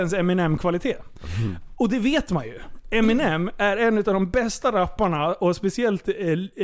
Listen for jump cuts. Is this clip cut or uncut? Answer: uncut